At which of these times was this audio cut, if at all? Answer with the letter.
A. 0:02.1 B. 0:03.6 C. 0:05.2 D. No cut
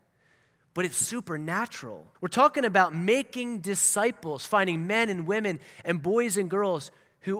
A